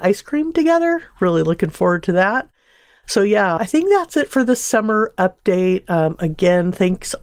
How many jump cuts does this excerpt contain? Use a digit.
1